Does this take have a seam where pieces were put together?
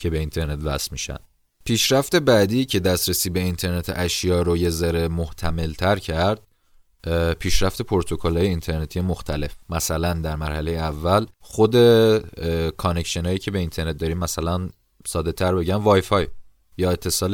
yes; 2 cuts; at 9.6 s, 11.3 s

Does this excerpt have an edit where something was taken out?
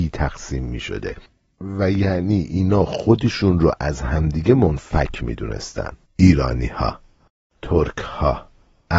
yes; 1 cut; at 6.0 s

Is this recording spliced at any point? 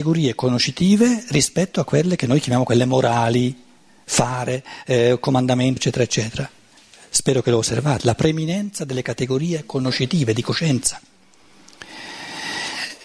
yes; 1 cut; at 5.8 s

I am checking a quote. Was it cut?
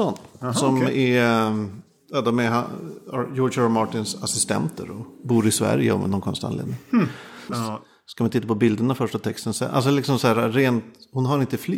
yes; 1 cut; at 7.5 s

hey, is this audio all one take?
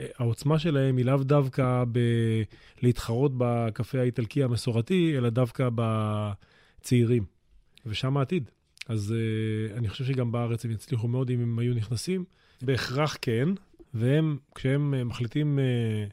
no; 2 cuts; at 12.6 s, 13.8 s

